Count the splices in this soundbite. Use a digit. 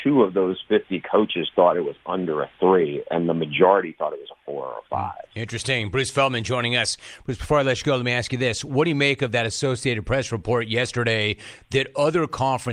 0